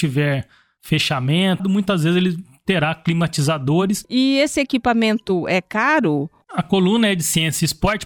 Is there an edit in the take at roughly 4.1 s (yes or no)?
no